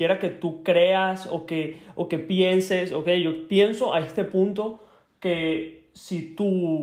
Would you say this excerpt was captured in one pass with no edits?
yes; 0 cuts

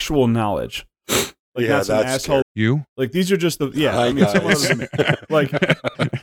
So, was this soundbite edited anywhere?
yes; 1 cut; at 2.4 s

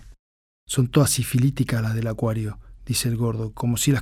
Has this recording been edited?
no; 0 cuts

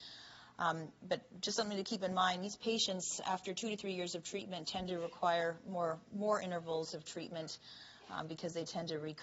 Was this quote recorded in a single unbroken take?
yes; 0 cuts

